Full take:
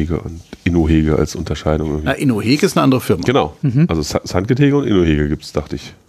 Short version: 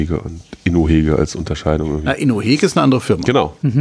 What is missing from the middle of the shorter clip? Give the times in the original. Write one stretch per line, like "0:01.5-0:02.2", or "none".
none